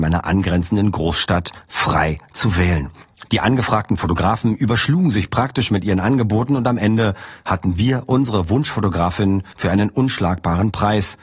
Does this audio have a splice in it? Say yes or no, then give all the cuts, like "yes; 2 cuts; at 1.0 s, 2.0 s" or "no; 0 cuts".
no; 0 cuts